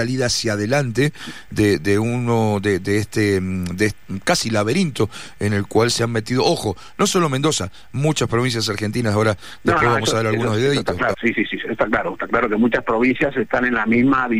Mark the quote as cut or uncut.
cut